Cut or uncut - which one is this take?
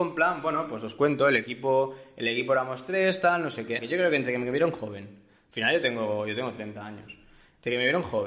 cut